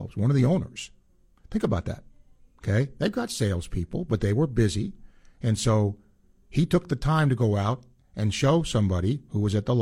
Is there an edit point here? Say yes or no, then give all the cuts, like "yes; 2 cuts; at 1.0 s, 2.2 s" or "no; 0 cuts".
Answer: no; 0 cuts